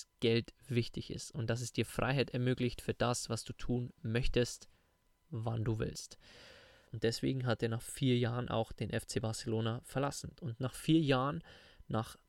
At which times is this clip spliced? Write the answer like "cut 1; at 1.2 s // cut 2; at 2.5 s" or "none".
cut 1; at 6.9 s // cut 2; at 10.4 s

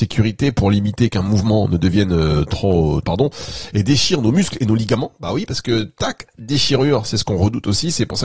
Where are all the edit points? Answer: cut 1; at 3.0 s

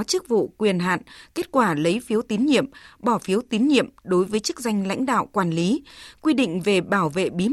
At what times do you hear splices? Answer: none

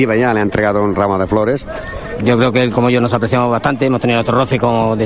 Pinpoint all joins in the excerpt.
cut 1; at 2.2 s

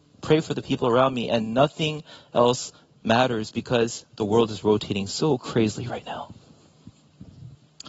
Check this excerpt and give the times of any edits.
none

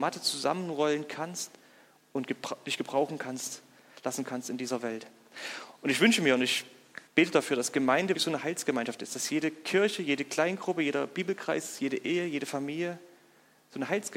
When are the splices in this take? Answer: cut 1; at 7.1 s // cut 2; at 8.1 s

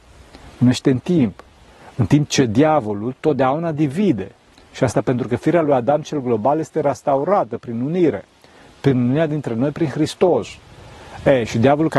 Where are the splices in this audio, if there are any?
none

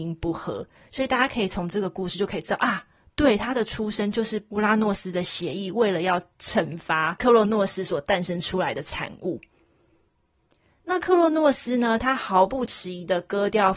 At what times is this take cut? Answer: none

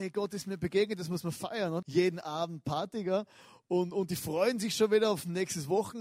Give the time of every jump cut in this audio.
cut 1; at 1.8 s

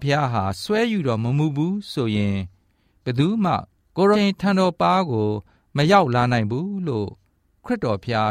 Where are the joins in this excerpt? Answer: cut 1; at 4.1 s

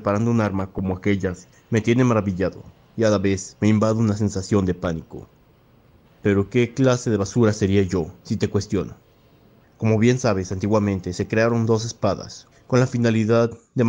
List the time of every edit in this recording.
cut 1; at 6.0 s // cut 2; at 9.6 s // cut 3; at 12.5 s

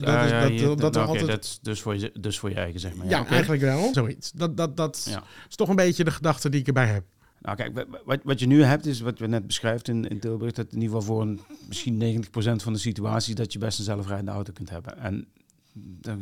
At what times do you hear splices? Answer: cut 1; at 3.9 s

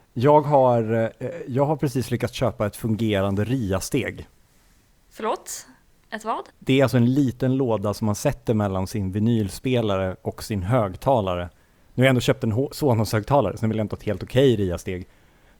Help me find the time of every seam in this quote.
cut 1; at 6.5 s

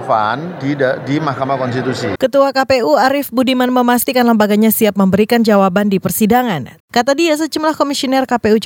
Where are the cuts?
cut 1; at 2.2 s // cut 2; at 6.8 s

